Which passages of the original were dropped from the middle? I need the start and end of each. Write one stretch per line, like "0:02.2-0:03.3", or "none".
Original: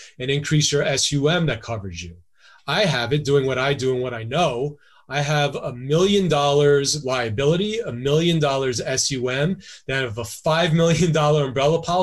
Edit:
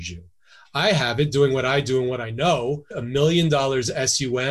0:04.8-0:07.8